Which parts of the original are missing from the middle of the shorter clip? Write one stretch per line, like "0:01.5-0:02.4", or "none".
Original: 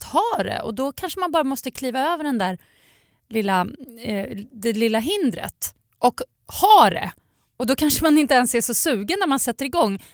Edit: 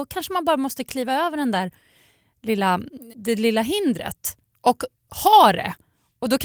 0:04.0-0:04.5